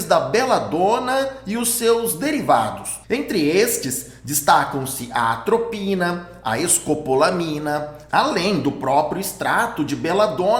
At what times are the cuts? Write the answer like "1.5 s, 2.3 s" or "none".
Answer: 3.0 s, 8.1 s